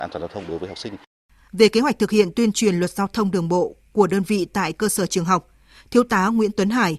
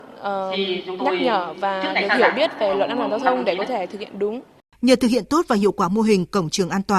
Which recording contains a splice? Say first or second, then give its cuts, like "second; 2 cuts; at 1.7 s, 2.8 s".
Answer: first; 1 cut; at 1.5 s